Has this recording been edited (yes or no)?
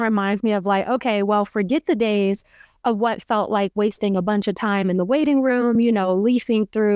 no